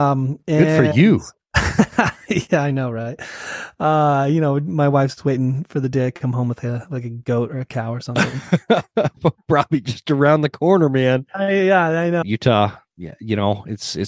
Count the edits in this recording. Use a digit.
1